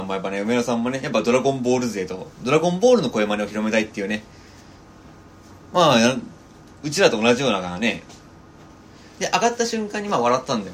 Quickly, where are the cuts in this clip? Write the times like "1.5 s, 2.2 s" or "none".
5.6 s, 9.1 s